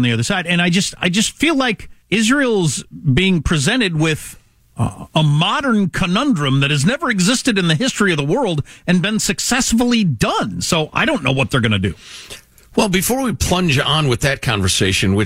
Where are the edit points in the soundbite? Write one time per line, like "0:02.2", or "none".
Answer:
0:02.0
0:04.6